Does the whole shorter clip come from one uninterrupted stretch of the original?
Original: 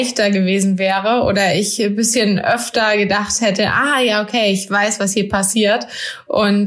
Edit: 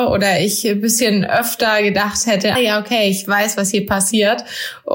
no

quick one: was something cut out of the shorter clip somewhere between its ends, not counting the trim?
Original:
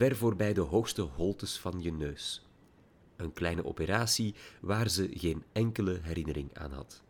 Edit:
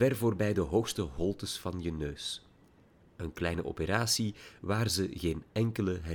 no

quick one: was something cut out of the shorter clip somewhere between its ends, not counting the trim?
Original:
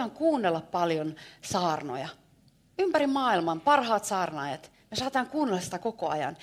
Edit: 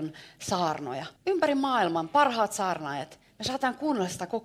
yes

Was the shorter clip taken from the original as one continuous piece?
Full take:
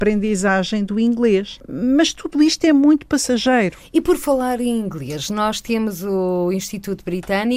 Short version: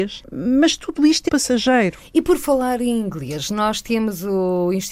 no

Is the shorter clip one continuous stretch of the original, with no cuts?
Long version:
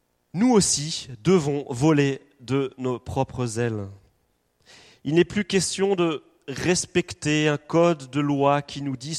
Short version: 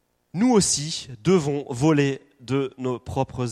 yes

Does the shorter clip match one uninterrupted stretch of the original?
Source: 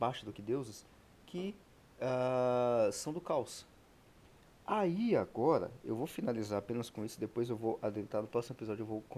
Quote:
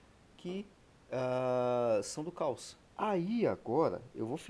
no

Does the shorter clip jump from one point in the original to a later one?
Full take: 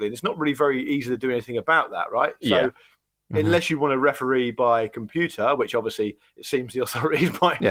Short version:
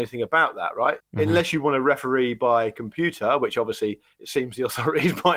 yes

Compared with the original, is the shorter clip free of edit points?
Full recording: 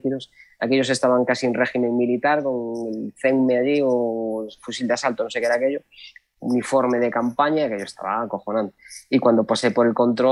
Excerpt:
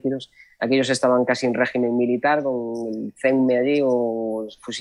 yes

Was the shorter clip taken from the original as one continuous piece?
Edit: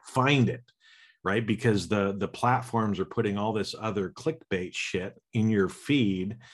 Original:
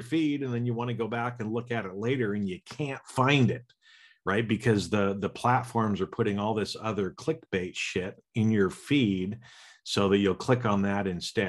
yes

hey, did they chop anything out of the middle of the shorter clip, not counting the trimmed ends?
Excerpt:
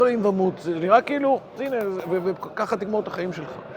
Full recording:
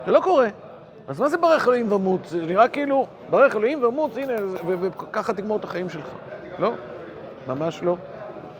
yes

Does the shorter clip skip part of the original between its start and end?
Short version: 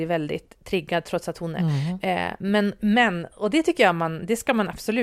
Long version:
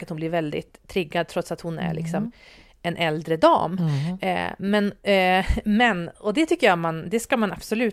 yes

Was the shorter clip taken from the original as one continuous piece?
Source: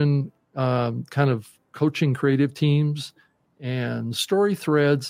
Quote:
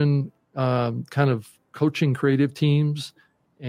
yes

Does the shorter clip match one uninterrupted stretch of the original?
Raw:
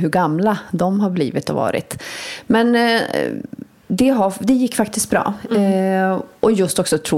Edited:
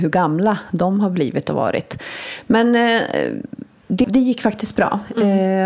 no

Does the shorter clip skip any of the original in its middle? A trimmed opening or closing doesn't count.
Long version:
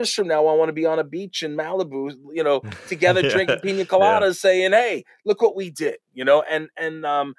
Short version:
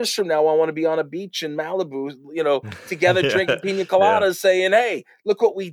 no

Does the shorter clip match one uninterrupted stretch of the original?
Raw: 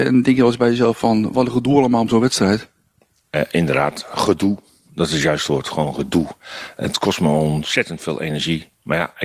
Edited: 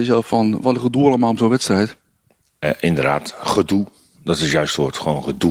yes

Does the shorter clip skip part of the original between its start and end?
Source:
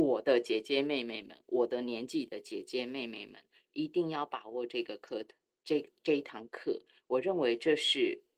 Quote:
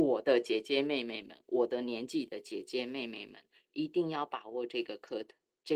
no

